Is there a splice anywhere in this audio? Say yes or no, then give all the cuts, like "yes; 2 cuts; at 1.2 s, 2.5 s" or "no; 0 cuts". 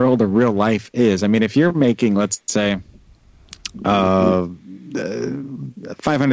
no; 0 cuts